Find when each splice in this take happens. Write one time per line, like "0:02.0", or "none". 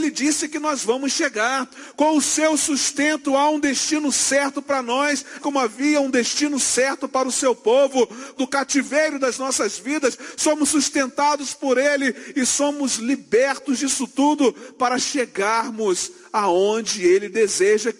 0:05.4
0:08.4